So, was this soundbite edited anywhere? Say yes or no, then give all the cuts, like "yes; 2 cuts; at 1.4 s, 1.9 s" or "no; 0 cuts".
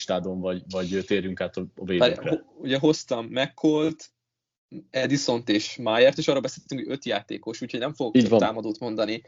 no; 0 cuts